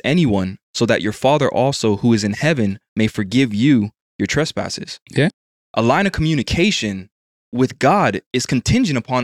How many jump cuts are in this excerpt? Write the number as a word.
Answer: zero